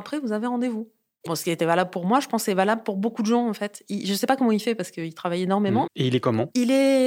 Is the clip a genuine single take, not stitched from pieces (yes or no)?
no